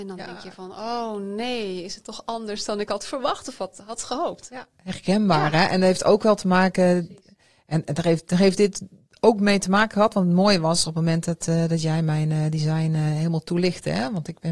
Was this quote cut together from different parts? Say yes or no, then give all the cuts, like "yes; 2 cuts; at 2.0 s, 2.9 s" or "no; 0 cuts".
no; 0 cuts